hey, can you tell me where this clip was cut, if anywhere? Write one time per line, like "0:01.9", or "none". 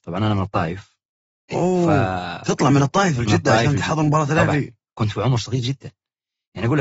none